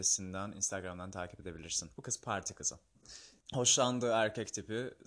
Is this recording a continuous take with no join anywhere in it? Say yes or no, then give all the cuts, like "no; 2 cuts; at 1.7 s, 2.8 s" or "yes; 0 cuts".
no; 2 cuts; at 1.9 s, 3.4 s